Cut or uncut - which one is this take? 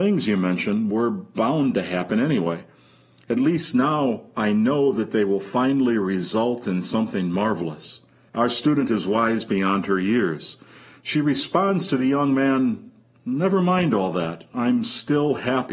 cut